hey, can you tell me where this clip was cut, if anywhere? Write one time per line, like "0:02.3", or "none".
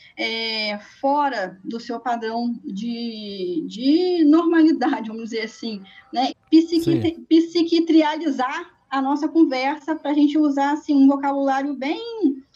0:06.3